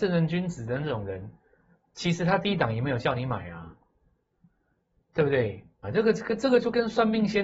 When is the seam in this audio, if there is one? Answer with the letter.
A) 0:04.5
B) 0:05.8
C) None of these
B